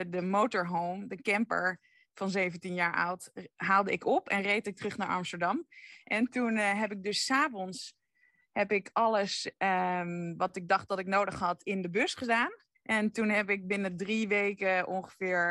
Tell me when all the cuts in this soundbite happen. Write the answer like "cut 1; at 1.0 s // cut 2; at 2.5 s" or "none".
cut 1; at 12.7 s